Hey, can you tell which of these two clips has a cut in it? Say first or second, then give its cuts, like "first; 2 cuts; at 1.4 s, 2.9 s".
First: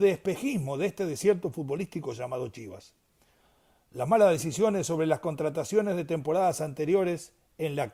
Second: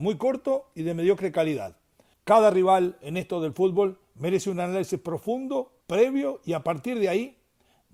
second; 2 cuts; at 2.1 s, 5.8 s